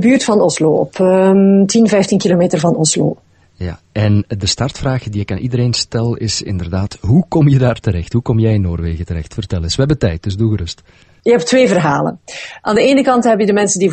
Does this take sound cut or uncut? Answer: uncut